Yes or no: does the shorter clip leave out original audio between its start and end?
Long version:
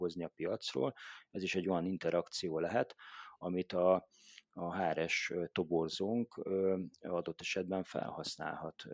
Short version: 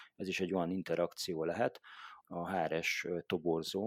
yes